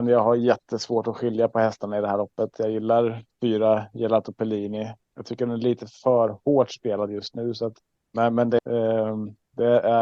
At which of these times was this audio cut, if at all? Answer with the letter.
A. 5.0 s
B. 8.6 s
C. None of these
B